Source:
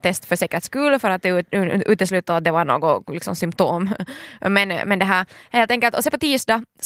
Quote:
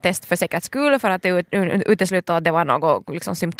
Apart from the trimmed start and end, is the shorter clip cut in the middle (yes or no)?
no